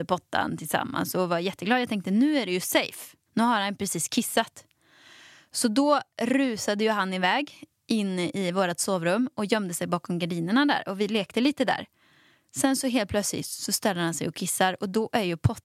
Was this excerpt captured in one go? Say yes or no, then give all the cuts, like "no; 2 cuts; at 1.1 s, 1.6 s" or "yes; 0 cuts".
no; 1 cut; at 3.3 s